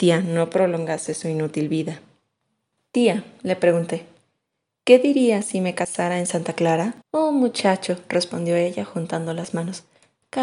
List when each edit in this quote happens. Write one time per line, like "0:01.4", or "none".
0:02.8
0:07.0